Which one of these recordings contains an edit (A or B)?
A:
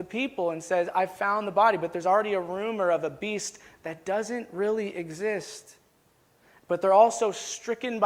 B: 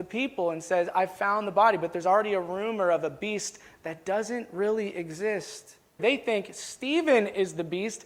B